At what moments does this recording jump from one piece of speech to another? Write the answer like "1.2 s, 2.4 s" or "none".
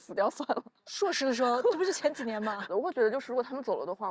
2.7 s